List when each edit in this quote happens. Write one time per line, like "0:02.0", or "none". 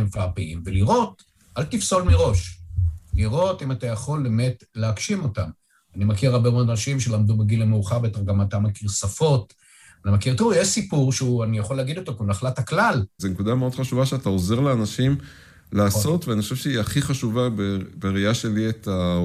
0:13.2